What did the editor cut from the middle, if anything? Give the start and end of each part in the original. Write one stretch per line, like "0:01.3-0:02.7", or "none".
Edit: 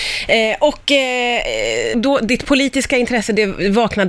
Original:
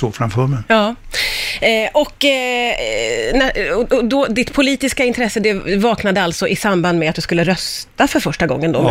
0:03.3-0:04.0